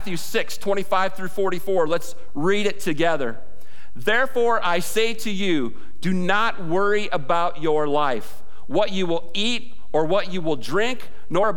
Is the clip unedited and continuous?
yes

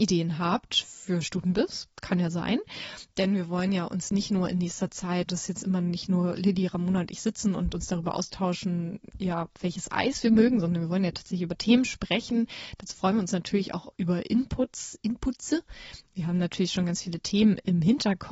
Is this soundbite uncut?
no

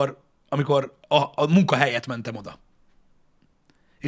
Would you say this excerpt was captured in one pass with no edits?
yes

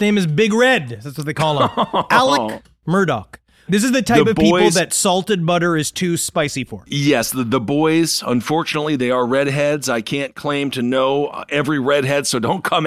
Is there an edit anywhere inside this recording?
yes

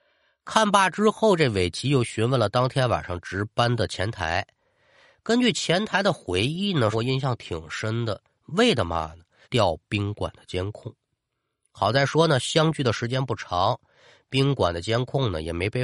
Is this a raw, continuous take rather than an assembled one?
no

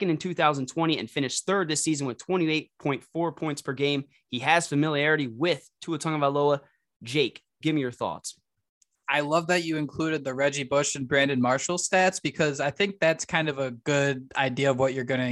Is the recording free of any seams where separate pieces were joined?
no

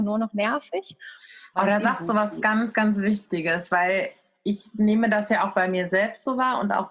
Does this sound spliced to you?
yes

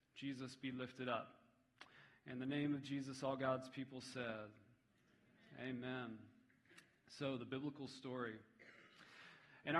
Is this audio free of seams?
yes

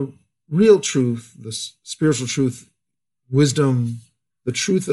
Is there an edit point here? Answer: no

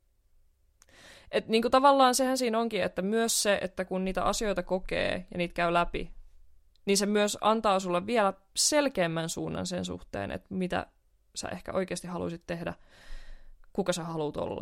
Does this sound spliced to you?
no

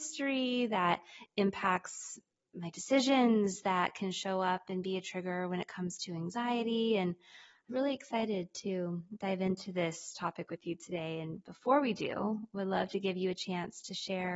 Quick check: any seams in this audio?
yes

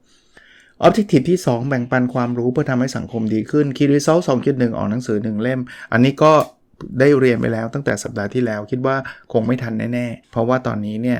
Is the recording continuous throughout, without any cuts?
no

